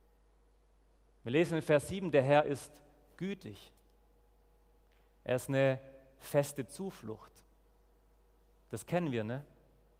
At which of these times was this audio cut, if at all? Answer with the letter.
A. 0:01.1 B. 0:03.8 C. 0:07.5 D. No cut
D